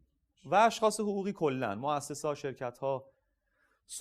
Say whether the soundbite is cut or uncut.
uncut